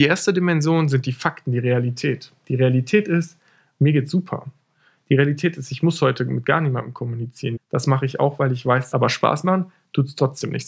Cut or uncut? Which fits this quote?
cut